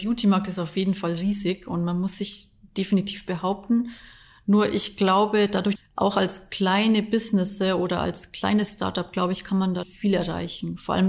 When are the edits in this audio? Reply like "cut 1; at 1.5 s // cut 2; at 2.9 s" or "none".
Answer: cut 1; at 5.8 s // cut 2; at 9.8 s